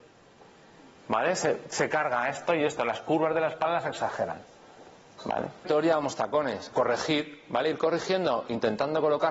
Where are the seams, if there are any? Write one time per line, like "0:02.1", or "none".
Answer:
0:05.6
0:06.7